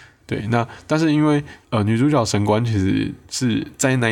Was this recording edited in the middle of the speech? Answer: yes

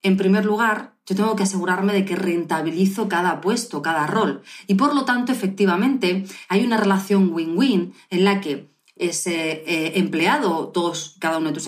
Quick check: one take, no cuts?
yes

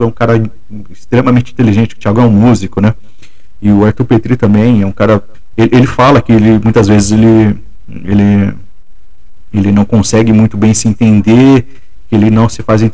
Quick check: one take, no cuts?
yes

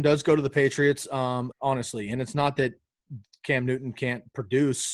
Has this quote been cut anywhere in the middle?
yes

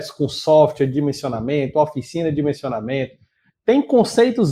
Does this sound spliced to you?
yes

